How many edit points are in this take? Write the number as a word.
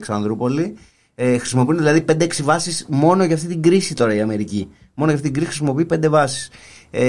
zero